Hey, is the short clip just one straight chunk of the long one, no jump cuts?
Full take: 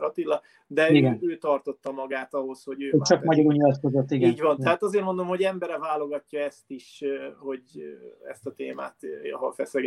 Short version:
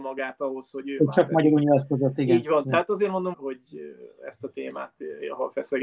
no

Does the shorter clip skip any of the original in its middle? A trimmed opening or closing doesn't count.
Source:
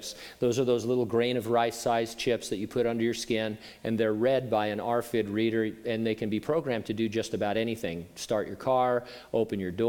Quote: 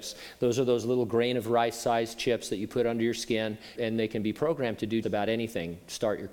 yes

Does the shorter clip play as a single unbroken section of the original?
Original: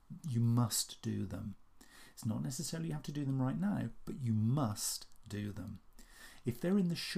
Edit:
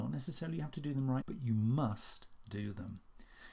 no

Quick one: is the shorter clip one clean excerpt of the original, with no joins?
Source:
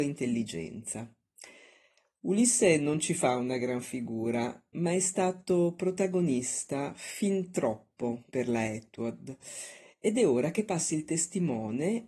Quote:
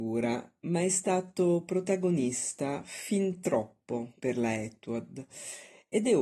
yes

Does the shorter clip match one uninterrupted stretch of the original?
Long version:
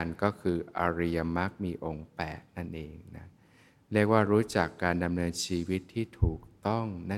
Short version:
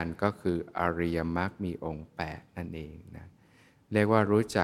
yes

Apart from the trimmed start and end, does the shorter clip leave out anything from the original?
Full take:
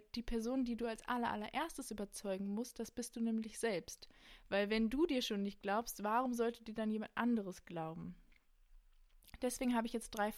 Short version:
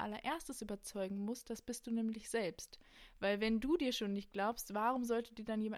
no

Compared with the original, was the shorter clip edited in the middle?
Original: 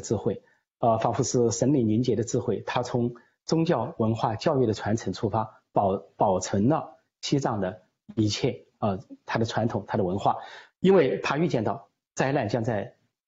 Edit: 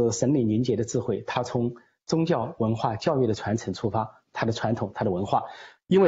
yes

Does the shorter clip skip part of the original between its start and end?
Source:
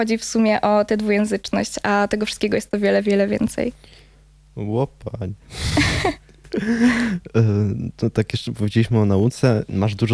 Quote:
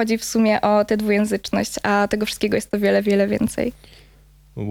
no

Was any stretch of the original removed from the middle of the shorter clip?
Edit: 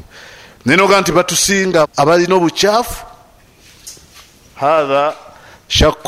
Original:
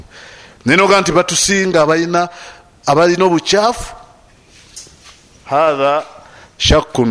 yes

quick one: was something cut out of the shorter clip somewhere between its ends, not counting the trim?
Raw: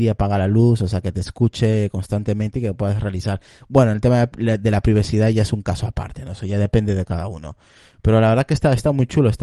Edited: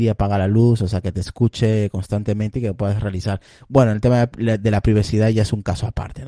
no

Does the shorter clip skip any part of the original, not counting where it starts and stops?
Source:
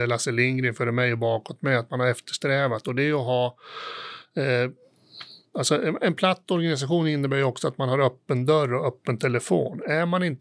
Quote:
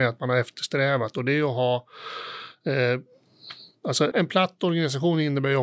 yes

